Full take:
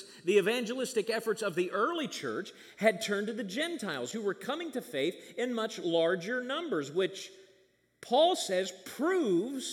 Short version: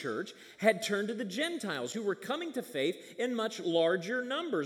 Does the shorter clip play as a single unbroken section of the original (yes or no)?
yes